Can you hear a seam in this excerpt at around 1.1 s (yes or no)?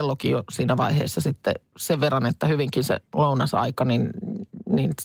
no